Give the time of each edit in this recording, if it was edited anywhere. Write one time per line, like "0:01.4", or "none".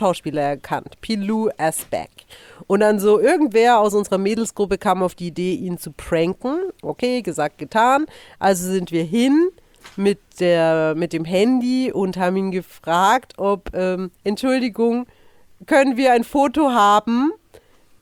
none